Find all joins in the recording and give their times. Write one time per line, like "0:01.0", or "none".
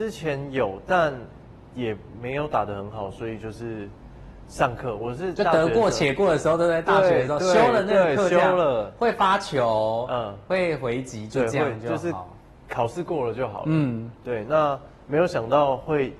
none